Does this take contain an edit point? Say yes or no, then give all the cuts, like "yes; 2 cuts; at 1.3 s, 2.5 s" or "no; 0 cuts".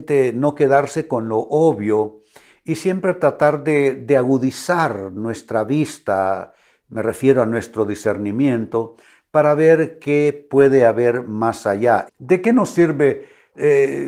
yes; 1 cut; at 12.1 s